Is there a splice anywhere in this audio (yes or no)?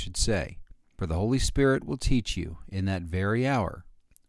no